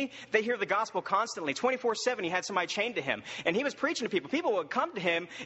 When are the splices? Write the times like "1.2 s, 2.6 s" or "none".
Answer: none